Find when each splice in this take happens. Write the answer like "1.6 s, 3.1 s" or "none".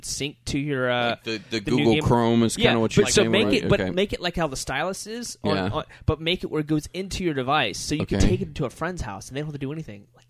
none